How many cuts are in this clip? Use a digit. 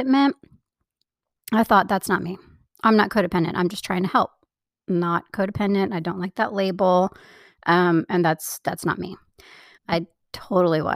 1